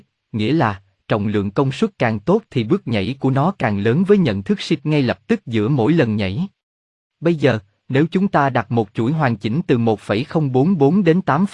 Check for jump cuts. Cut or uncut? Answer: uncut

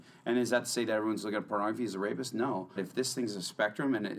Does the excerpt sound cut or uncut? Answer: cut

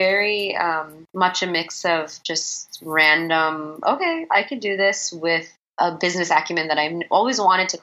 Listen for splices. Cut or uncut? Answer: uncut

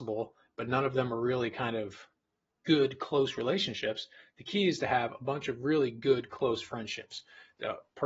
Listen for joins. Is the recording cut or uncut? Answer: uncut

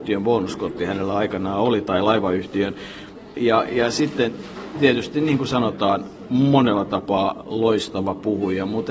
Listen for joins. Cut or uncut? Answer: cut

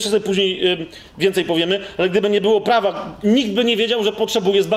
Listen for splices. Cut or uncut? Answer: cut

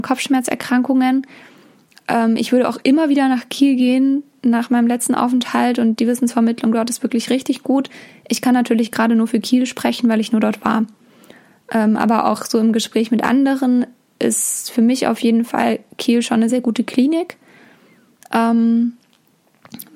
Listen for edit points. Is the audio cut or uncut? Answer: cut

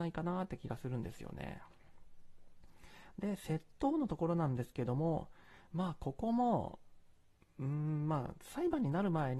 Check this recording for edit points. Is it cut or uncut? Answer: uncut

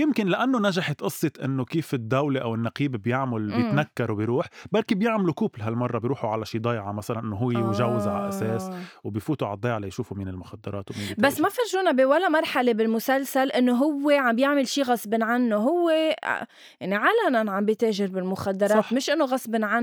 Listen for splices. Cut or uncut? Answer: uncut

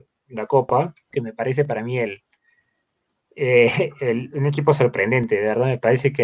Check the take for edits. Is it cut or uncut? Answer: cut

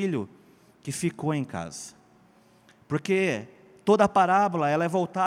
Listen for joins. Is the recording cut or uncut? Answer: uncut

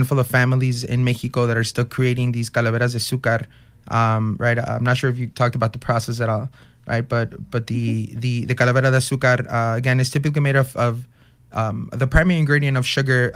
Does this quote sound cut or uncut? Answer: uncut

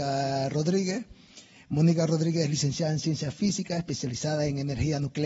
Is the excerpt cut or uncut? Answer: uncut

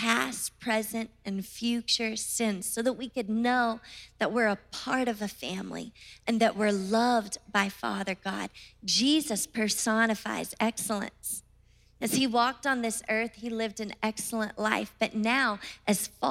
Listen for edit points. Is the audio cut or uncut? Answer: uncut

